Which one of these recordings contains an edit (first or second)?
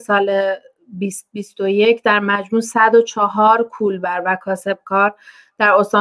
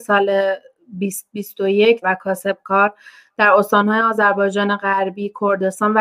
second